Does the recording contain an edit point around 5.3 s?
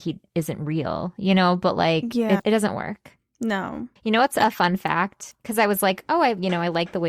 yes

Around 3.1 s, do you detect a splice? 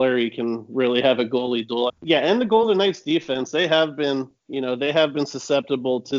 no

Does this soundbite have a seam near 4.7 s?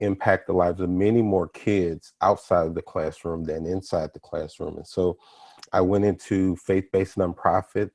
no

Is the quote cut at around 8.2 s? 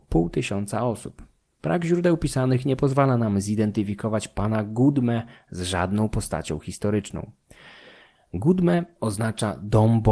yes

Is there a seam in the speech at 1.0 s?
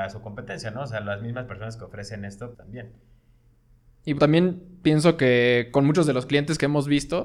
no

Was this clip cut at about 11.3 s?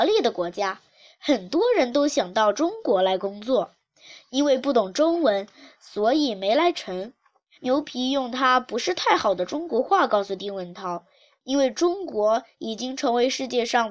no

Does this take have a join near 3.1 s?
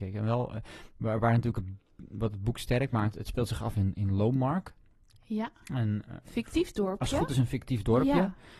yes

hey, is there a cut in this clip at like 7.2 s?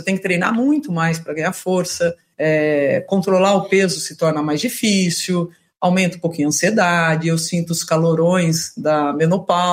no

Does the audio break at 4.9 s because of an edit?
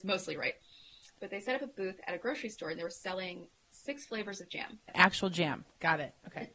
yes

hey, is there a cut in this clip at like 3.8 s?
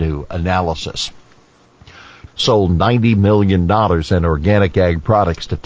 no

